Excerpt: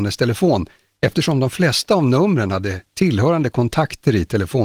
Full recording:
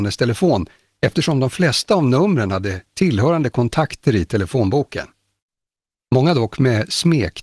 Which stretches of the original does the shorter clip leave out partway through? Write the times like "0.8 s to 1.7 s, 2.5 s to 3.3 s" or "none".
none